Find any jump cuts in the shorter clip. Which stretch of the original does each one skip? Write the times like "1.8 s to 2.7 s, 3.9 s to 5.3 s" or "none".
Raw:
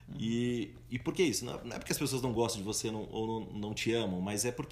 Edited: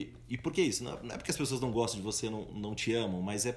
3.1 s to 3.5 s